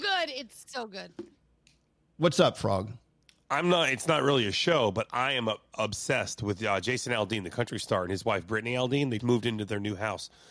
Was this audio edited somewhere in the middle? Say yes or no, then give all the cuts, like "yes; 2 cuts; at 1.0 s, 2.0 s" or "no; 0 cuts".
yes; 1 cut; at 9.2 s